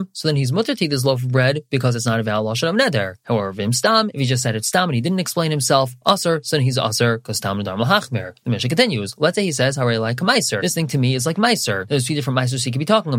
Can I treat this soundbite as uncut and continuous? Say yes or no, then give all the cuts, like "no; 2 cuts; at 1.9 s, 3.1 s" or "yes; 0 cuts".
yes; 0 cuts